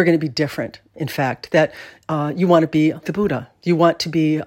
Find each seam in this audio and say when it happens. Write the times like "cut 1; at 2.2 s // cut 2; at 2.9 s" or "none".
cut 1; at 0.9 s // cut 2; at 3.0 s